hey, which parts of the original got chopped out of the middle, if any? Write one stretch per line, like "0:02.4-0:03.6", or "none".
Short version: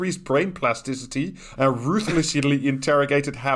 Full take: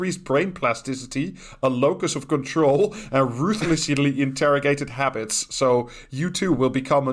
0:01.6-0:03.1